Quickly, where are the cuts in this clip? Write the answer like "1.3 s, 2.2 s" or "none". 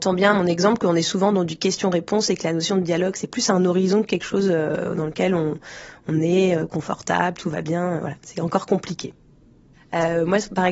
none